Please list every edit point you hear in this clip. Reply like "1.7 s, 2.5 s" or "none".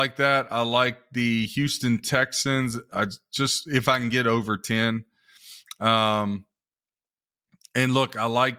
none